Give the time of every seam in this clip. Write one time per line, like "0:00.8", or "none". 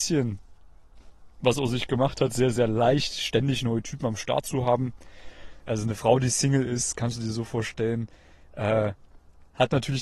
0:05.6